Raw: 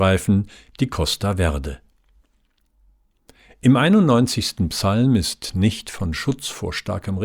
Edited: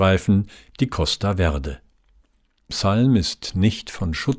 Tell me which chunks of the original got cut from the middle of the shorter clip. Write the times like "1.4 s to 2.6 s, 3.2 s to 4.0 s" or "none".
2.7 s to 4.7 s